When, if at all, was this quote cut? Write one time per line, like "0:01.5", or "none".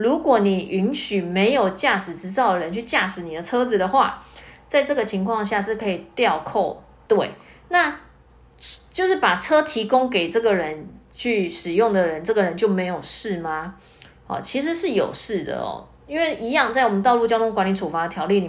0:07.1